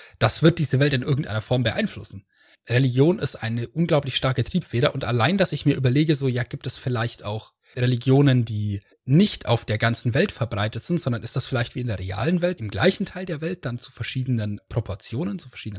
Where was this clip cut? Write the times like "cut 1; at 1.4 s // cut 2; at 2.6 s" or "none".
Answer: cut 1; at 3.4 s // cut 2; at 12.6 s

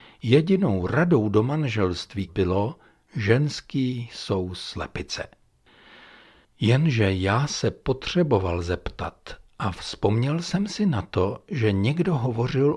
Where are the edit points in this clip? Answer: cut 1; at 2.3 s

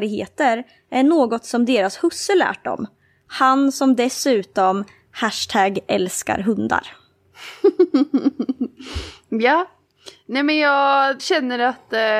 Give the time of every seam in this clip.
cut 1; at 11.2 s

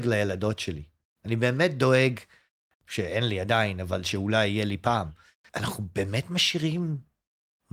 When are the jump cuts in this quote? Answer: cut 1; at 2.7 s

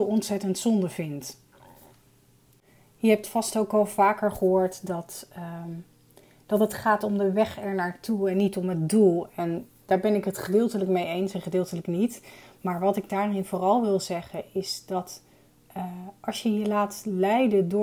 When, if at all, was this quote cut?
none

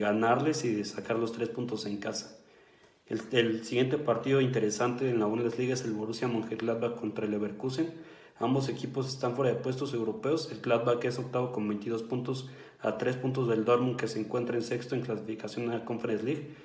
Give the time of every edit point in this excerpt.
none

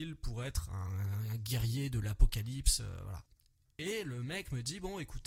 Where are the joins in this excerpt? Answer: none

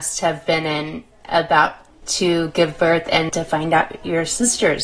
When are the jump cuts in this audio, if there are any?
cut 1; at 3.3 s

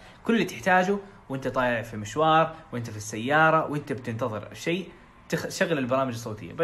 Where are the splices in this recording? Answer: none

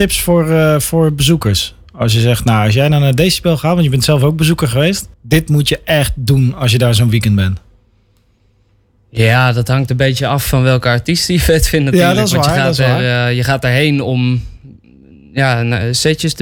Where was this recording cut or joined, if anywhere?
cut 1; at 5.1 s

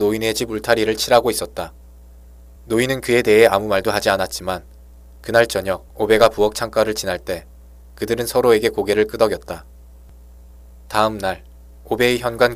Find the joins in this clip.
cut 1; at 2.5 s // cut 2; at 5.9 s

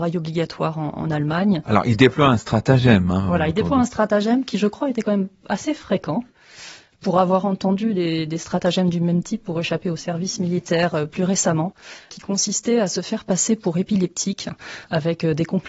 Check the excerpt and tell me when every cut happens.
none

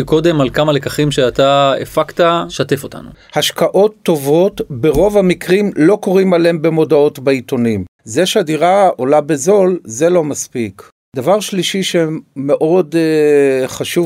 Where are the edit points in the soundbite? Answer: cut 1; at 3.1 s // cut 2; at 8.0 s

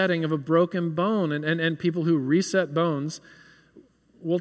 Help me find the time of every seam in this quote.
none

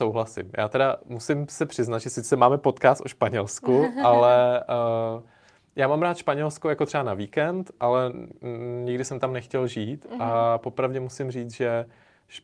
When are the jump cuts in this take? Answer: none

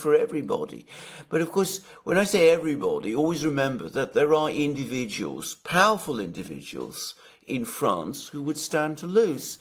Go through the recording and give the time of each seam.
none

